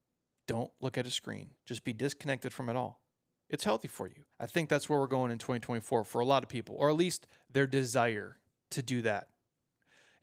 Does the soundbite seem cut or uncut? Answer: cut